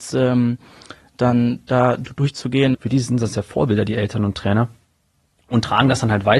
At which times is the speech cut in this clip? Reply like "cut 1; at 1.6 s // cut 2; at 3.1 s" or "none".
cut 1; at 2.7 s